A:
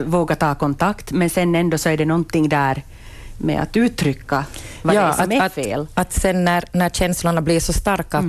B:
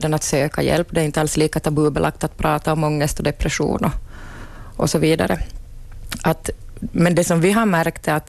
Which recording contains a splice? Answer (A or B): A